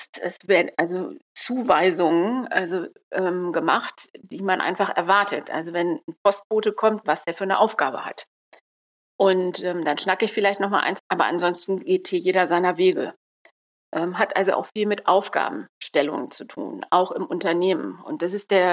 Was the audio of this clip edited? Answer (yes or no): yes